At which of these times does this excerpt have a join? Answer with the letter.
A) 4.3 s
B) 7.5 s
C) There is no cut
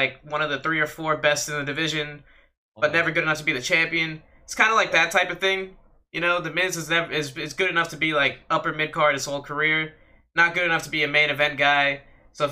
C